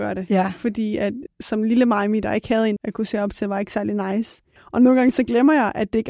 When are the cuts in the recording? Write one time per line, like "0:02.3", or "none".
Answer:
0:01.3
0:02.8
0:04.6